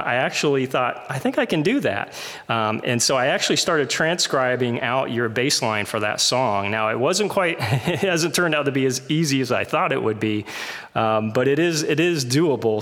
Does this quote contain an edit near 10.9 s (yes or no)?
no